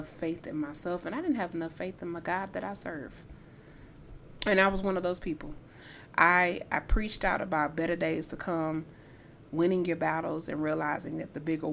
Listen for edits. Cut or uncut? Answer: cut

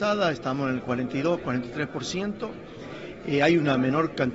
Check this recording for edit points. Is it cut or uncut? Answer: uncut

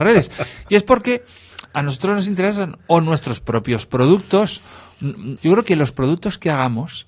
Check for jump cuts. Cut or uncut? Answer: cut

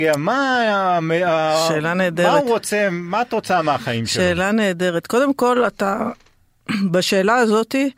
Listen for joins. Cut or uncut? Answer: uncut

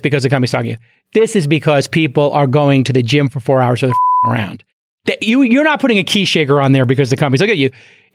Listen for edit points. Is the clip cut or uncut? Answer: uncut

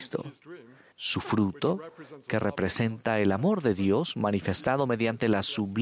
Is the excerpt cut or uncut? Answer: cut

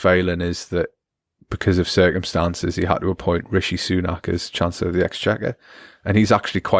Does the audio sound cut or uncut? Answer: uncut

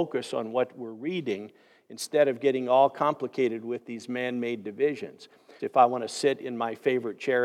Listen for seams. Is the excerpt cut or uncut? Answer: cut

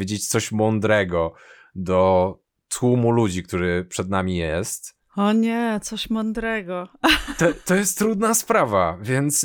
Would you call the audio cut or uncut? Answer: uncut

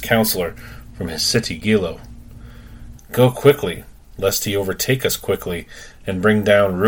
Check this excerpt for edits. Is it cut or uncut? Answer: cut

